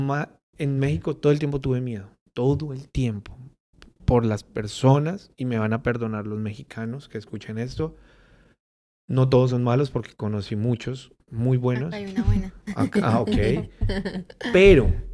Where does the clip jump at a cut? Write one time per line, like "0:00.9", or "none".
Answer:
none